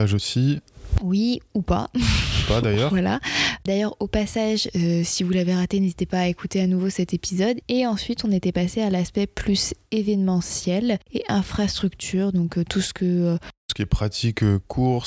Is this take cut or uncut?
cut